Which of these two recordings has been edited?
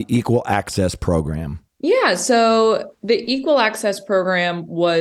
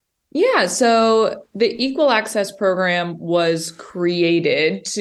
first; 1 cut; at 1.7 s

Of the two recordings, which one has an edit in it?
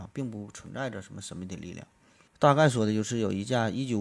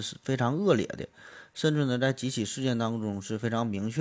first; 1 cut; at 2.3 s

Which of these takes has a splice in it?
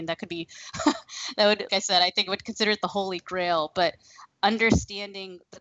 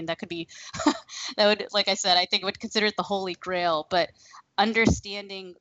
first; 1 cut; at 1.7 s

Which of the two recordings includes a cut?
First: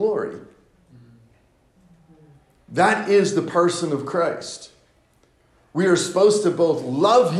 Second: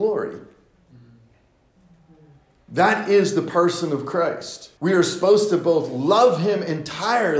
second; 1 cut; at 4.8 s

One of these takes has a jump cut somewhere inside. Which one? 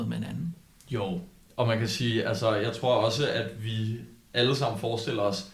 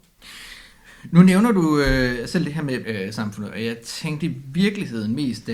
second; 1 cut; at 2.8 s

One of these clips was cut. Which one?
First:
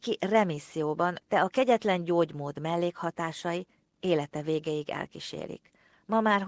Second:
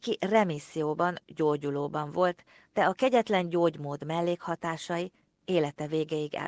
first; 1 cut; at 1.2 s

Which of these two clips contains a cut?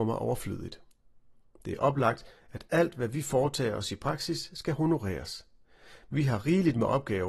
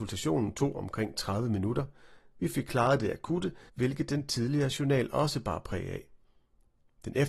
second; 1 cut; at 3.7 s

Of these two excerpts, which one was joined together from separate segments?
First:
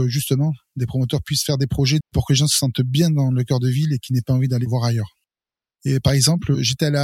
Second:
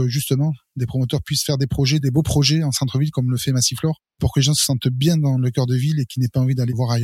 first; 2 cuts; at 2.0 s, 5.7 s

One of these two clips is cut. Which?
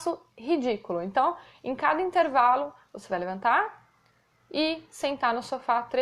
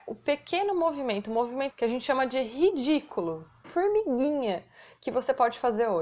second; 2 cuts; at 1.7 s, 3.6 s

